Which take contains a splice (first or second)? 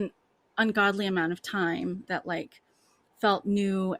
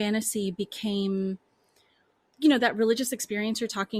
first